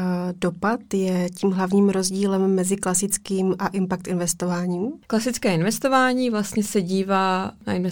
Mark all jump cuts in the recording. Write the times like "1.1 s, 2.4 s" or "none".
5.1 s